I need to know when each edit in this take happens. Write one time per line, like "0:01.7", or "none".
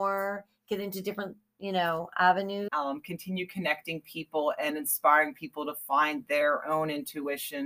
0:02.7